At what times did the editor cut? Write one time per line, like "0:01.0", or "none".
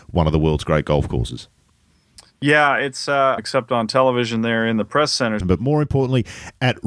0:03.4
0:05.4